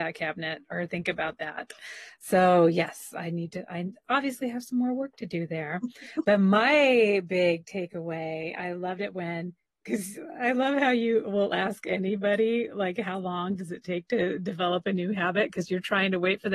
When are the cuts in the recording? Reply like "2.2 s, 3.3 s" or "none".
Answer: none